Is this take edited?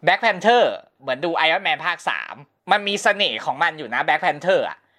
no; 0 cuts

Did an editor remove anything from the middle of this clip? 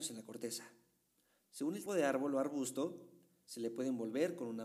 yes; 1 cut; at 1.9 s

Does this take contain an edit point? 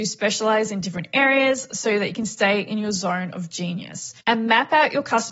yes; 1 cut; at 4.2 s

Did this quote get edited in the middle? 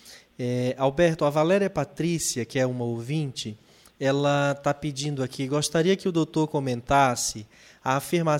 no; 0 cuts

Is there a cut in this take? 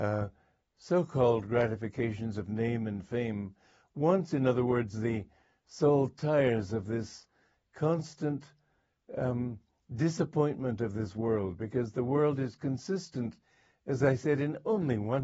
no; 0 cuts

